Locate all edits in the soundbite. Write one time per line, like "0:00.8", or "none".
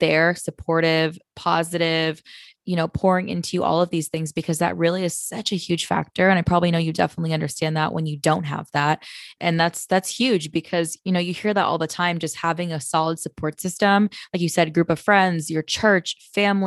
0:09.4